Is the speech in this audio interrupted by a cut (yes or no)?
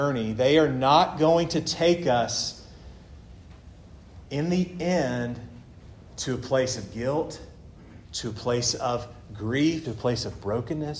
yes